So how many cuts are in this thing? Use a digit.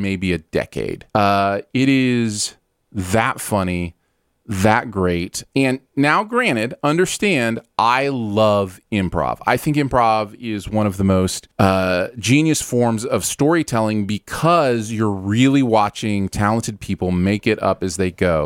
2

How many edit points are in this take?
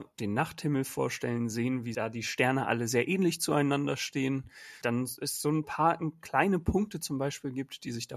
0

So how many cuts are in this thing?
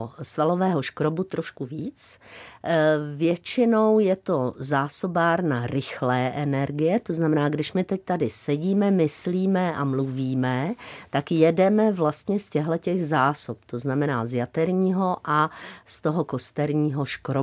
0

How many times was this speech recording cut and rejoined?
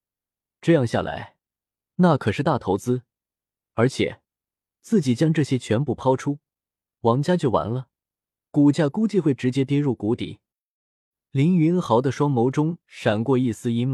2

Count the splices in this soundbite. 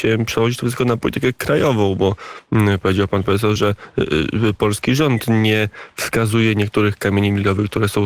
1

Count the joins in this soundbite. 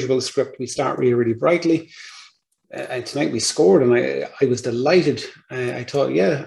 0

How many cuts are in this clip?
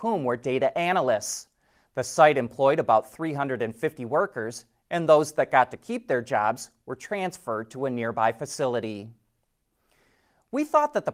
0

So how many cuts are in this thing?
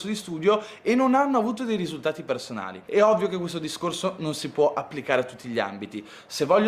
0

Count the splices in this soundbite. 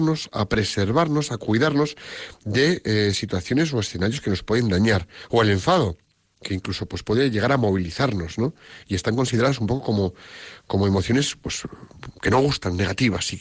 0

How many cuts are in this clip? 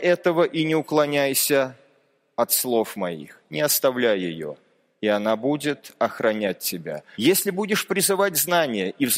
1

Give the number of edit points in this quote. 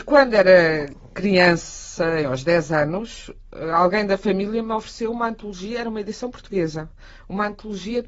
1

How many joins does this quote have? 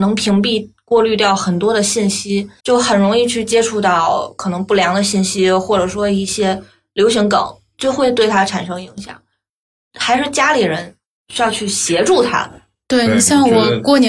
1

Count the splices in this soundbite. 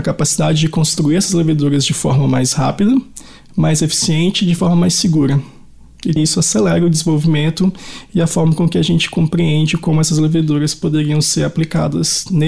1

